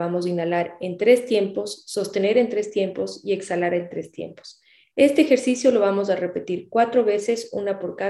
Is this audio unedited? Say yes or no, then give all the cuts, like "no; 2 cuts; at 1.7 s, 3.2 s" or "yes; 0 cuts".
yes; 0 cuts